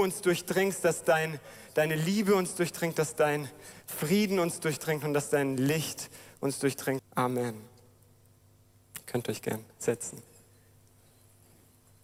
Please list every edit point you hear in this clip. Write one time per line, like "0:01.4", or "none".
0:07.0